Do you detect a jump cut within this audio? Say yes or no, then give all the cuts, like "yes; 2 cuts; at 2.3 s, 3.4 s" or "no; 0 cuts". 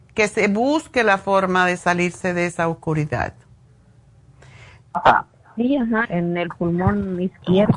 yes; 2 cuts; at 4.8 s, 6.0 s